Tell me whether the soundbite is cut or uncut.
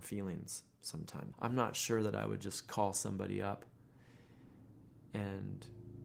cut